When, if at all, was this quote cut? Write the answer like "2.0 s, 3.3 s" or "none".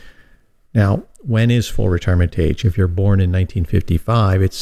2.6 s